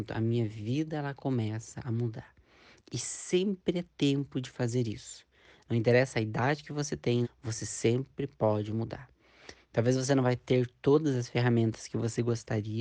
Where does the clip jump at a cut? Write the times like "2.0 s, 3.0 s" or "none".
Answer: 7.2 s, 9.5 s